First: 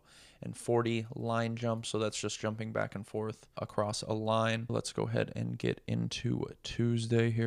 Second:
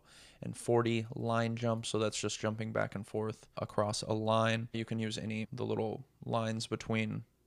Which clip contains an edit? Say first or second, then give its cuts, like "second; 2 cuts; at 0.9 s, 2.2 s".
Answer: first; 1 cut; at 4.7 s